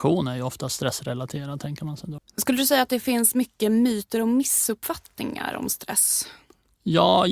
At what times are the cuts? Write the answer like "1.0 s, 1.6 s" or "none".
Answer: 2.2 s